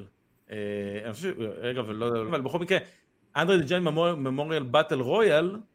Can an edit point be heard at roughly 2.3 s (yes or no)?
yes